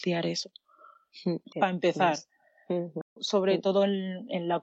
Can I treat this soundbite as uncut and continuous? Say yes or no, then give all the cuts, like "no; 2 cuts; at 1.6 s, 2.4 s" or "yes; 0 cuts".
no; 2 cuts; at 1.5 s, 3.0 s